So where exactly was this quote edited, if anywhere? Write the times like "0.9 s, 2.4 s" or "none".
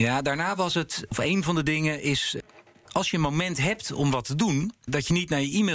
none